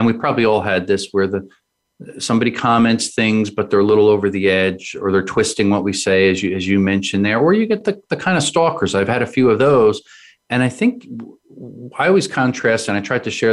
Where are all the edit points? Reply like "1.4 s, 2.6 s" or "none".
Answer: none